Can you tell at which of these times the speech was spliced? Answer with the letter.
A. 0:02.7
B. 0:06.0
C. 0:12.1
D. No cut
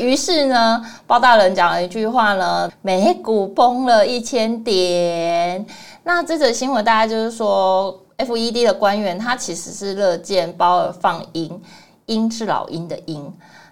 A